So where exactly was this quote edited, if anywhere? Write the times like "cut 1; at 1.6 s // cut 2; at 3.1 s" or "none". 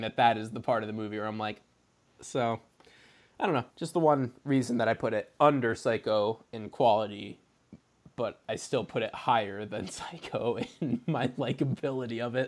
cut 1; at 2.1 s // cut 2; at 3.7 s